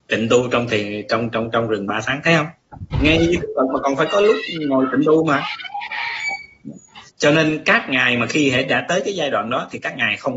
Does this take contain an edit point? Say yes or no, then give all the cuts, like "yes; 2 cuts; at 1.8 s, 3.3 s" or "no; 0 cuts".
yes; 1 cut; at 7.1 s